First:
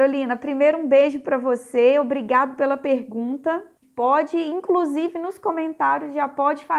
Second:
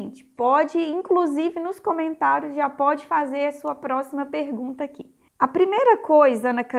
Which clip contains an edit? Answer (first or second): first